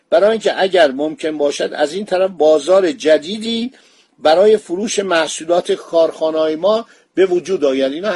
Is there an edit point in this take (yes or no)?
no